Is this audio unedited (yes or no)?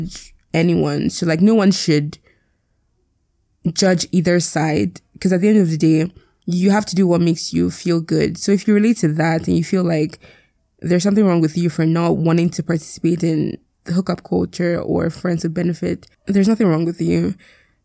no